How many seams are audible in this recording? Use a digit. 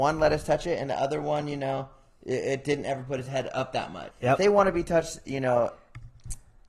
1